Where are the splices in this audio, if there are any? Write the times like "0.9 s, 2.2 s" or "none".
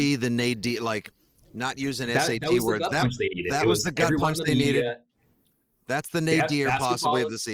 none